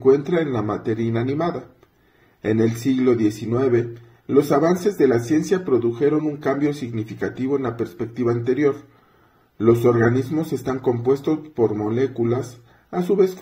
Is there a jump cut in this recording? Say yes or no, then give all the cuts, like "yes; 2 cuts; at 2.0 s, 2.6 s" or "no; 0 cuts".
no; 0 cuts